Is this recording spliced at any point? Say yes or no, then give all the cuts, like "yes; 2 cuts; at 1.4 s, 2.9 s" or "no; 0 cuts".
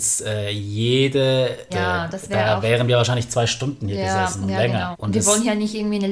yes; 2 cuts; at 1.7 s, 4.9 s